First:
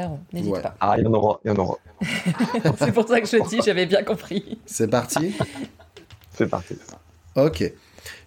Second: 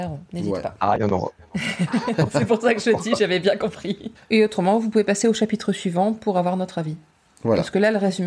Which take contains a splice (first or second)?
second